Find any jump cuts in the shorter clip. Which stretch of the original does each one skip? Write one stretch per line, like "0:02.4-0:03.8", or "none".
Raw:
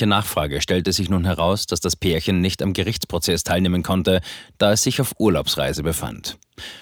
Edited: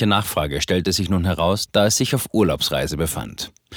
0:01.7-0:04.5